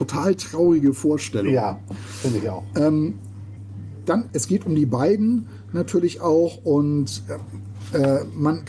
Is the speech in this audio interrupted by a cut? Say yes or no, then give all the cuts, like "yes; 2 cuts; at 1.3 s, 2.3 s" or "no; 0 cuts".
yes; 1 cut; at 4.3 s